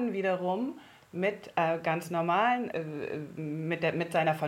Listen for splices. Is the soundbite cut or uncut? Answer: cut